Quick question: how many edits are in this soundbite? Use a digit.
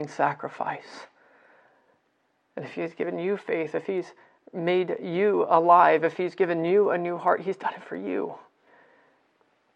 1